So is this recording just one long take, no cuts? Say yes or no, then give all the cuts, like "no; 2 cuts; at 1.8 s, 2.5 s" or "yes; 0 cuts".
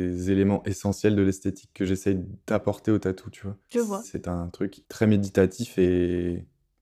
no; 1 cut; at 4.0 s